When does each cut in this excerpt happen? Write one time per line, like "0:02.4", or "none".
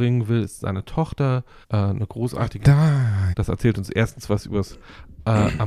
0:01.6
0:03.3